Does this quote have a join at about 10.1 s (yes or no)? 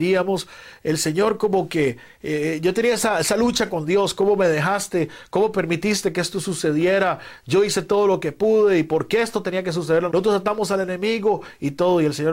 yes